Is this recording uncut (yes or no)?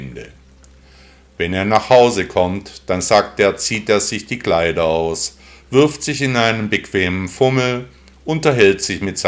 yes